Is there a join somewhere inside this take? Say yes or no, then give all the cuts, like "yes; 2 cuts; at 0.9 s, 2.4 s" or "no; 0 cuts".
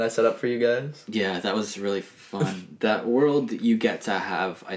no; 0 cuts